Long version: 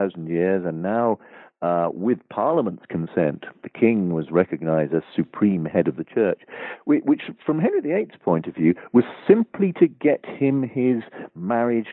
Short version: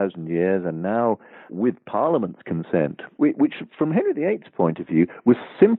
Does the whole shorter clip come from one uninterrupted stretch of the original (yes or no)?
no